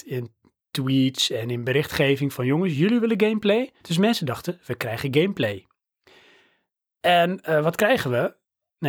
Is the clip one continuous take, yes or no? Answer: no